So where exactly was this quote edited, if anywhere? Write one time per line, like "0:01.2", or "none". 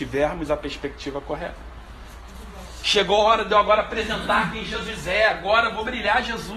0:02.8